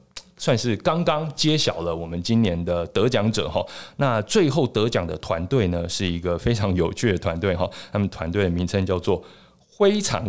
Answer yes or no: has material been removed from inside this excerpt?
no